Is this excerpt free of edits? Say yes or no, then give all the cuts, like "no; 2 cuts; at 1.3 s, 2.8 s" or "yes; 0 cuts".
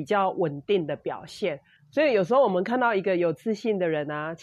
no; 1 cut; at 1.8 s